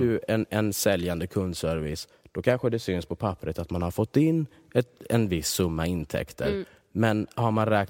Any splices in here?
no; 0 cuts

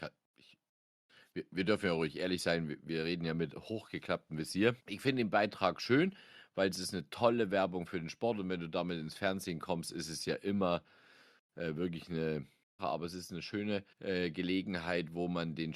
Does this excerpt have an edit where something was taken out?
yes; 3 cuts; at 4.8 s, 12.8 s, 13.9 s

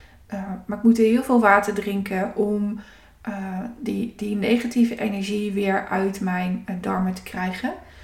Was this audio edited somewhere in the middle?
no; 0 cuts

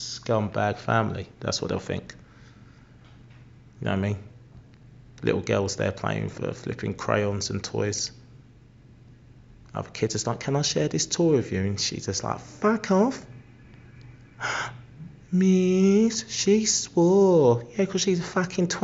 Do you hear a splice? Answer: no; 0 cuts

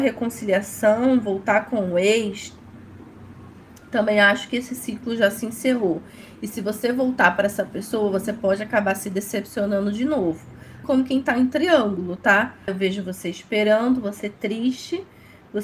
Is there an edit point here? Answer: yes; 2 cuts; at 10.8 s, 12.7 s

